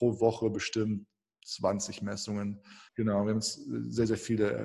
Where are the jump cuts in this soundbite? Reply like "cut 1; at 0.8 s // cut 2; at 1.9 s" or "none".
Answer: cut 1; at 2.9 s